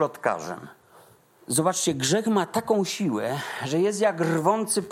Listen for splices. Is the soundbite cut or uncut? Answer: cut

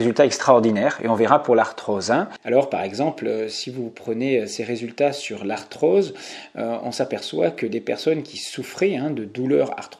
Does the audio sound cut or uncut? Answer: cut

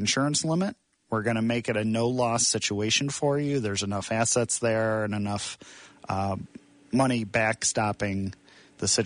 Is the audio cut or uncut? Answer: uncut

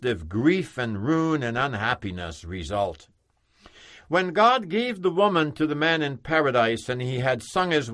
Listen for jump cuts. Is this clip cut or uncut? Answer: uncut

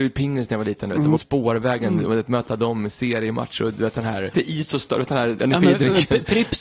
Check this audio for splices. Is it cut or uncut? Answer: cut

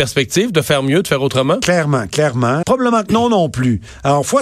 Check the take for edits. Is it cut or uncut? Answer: cut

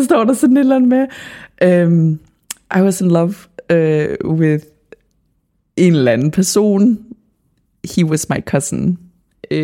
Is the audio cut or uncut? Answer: uncut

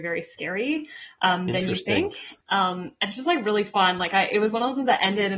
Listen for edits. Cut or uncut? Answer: cut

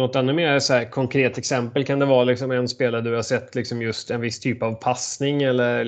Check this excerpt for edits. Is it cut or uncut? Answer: uncut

